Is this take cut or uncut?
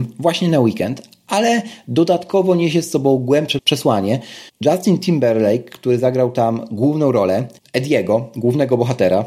uncut